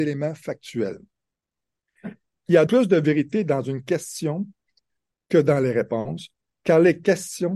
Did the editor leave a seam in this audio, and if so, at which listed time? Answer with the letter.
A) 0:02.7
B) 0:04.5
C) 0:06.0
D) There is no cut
A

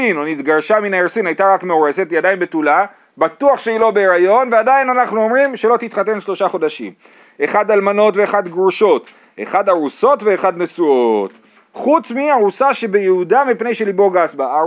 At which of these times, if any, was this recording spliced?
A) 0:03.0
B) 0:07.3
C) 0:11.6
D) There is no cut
C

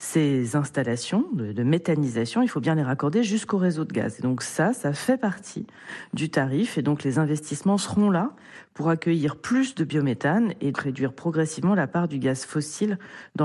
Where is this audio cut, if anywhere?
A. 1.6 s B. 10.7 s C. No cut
B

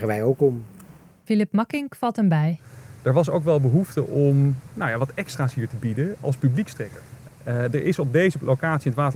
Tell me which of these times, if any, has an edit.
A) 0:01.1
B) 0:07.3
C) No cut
B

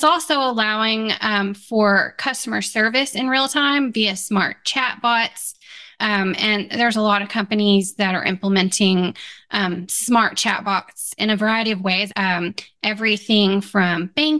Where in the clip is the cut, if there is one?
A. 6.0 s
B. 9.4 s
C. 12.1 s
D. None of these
C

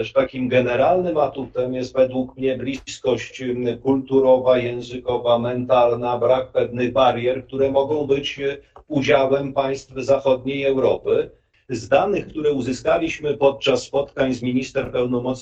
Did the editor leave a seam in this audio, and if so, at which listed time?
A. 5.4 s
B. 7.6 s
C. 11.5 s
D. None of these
C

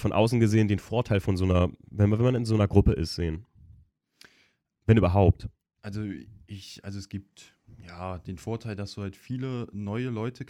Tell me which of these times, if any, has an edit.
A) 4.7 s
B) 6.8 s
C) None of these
C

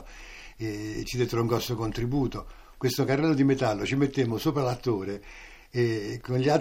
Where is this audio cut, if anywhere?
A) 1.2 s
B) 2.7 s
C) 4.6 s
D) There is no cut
B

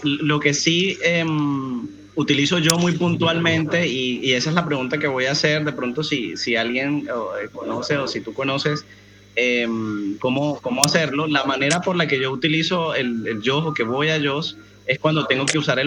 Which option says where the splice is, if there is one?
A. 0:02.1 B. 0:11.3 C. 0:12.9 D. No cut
A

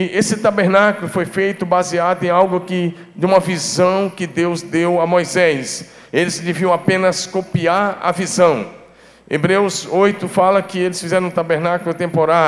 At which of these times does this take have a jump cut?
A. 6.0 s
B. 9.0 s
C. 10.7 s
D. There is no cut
D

